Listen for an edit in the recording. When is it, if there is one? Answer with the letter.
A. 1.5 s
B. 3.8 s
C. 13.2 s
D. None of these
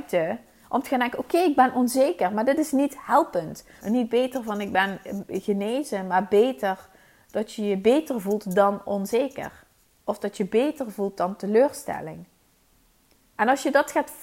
B